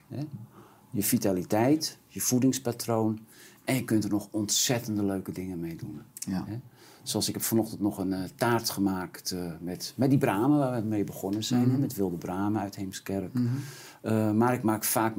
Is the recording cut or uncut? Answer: uncut